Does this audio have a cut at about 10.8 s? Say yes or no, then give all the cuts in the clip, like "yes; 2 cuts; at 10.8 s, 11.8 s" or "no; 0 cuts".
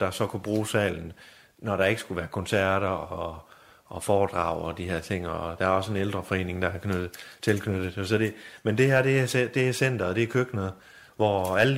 no; 0 cuts